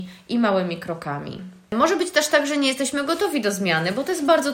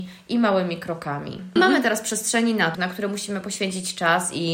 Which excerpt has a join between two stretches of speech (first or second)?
second